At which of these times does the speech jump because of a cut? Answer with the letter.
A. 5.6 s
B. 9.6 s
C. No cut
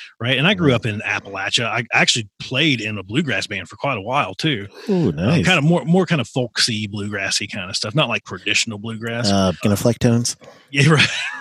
B